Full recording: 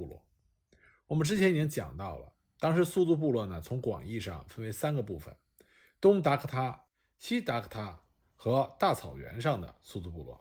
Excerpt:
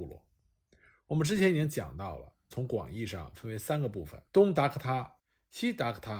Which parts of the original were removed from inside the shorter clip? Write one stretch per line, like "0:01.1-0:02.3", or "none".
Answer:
0:02.5-0:03.6
0:05.4-0:05.9